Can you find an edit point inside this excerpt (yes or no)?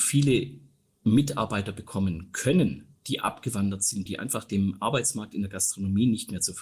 yes